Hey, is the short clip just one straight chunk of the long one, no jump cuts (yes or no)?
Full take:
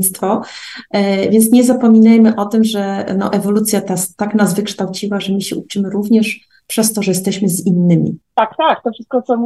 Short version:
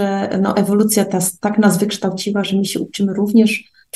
yes